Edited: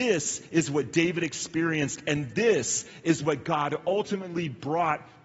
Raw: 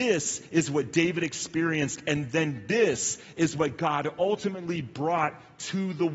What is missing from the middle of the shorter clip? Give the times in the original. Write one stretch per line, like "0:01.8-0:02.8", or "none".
0:02.3-0:02.6

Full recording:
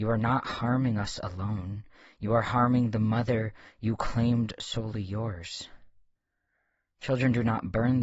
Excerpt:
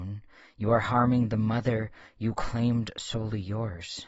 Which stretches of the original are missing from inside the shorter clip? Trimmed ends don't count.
none

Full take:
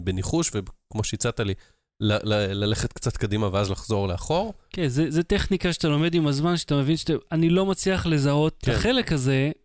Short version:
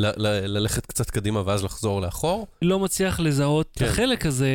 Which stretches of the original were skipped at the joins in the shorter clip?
0:04.7-0:07.5

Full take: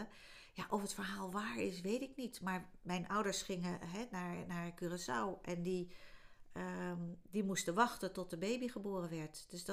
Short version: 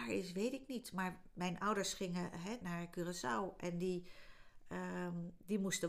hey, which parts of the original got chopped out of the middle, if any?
0:04.1-0:04.5

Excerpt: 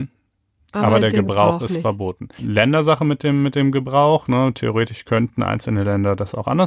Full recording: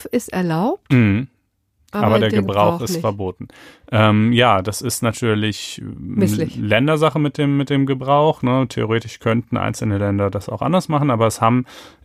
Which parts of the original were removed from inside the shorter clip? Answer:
0:03.6-0:06.5

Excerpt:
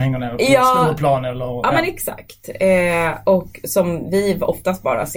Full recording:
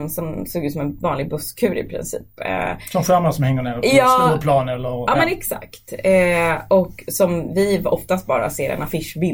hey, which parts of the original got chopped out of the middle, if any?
none

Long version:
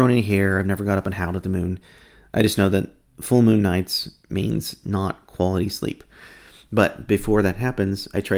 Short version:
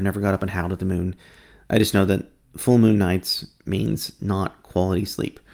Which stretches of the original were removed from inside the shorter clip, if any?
none

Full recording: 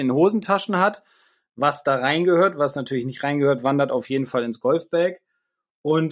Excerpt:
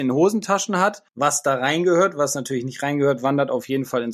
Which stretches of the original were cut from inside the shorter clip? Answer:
0:01.1-0:01.5

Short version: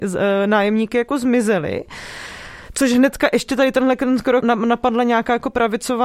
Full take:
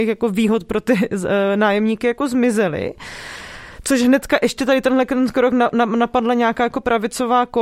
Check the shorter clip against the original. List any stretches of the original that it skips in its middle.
0:05.5-0:05.7

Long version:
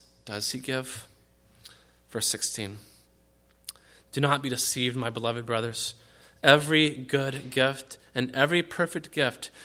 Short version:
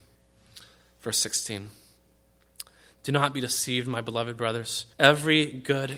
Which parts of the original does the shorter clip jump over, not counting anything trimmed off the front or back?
0:06.0-0:06.4

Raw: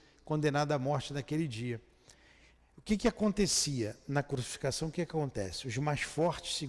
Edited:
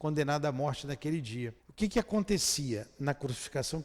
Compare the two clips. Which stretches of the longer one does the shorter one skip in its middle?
0:01.9-0:02.7

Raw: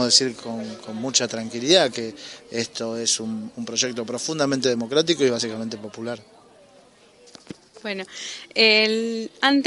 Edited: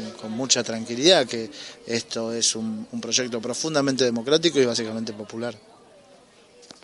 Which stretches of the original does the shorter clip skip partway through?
none

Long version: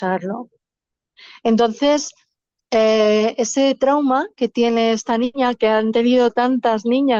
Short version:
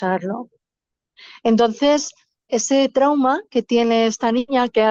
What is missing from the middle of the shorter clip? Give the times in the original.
0:02.5-0:03.3

